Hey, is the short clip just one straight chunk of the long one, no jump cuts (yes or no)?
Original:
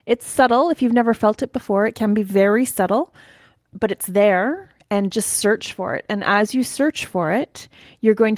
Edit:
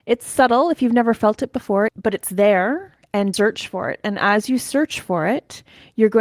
no